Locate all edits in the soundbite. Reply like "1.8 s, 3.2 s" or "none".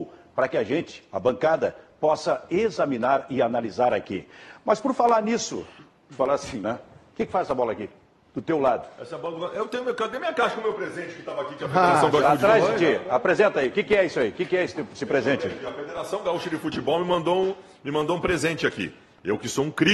6.6 s